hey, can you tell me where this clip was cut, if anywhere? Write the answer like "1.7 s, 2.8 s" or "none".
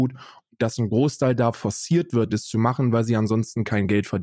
2.3 s